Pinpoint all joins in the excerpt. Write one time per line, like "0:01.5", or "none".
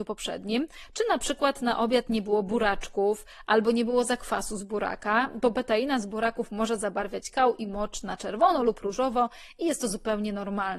none

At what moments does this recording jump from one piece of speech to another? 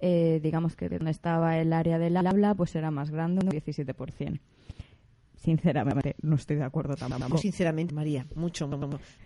0:07.9

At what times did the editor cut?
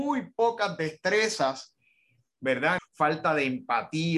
0:02.8

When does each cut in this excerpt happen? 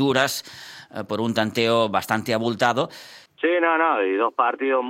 0:03.3

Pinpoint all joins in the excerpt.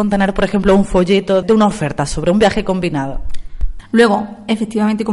0:01.4
0:03.8

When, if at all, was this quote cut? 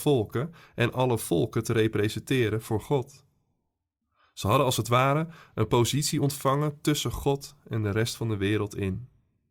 none

